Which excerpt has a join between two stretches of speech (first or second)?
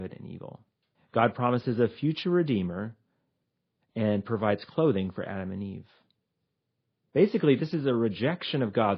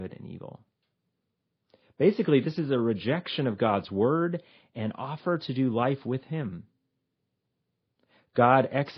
first